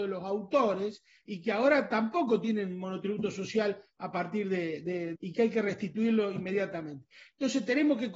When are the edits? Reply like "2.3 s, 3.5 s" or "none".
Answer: 5.2 s